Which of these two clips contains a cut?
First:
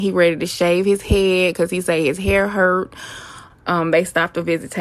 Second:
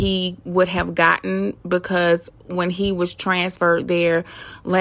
first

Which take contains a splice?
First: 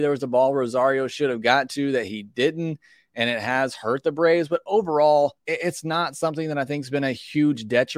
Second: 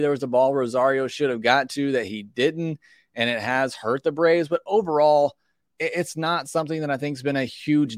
first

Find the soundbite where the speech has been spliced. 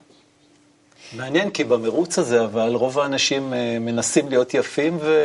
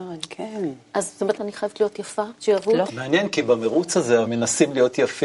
second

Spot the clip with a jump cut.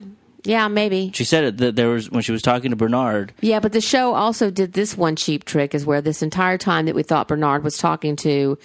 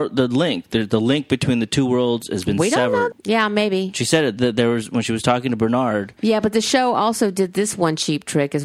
second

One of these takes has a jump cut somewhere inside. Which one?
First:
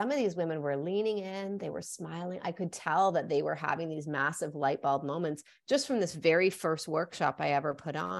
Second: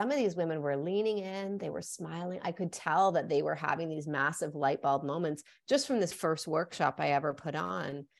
second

